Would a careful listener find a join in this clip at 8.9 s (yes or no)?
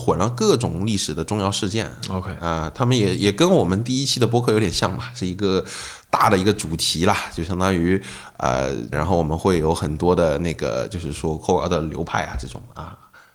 yes